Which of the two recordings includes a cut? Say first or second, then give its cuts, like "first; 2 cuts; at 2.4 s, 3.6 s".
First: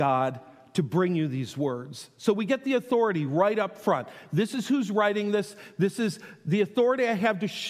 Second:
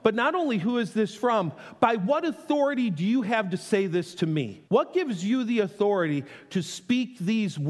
second; 1 cut; at 4.7 s